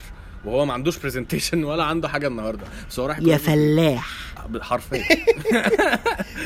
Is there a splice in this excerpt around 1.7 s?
no; 0 cuts

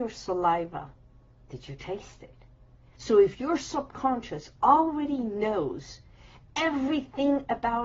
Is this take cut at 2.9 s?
yes; 1 cut; at 2.9 s

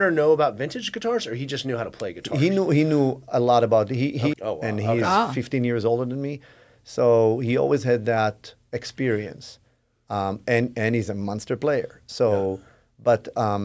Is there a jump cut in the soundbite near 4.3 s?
yes; 1 cut; at 4.3 s

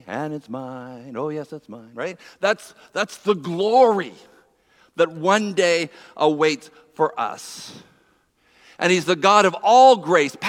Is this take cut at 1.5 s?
no; 0 cuts

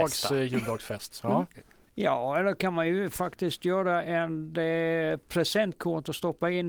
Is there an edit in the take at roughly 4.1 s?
no; 1 cut; at 1.9 s

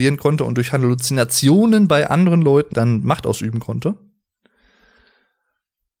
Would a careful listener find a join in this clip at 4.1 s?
no; 1 cut; at 2.7 s

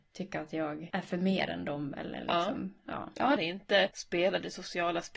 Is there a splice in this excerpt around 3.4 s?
yes; 1 cut; at 3.4 s

